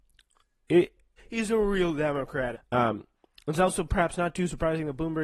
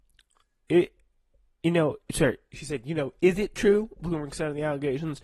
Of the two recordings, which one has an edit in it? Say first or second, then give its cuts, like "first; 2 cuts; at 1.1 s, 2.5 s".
first; 2 cuts; at 1.2 s, 2.5 s